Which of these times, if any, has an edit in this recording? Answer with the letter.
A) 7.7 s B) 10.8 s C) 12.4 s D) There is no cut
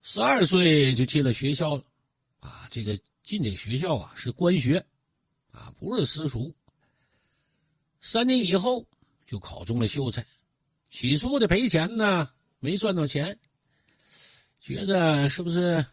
B